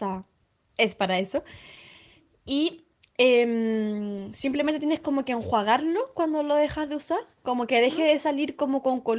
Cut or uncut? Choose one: cut